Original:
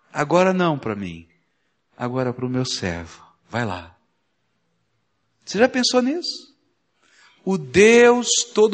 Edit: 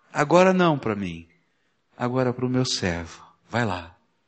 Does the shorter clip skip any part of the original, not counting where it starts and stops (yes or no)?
no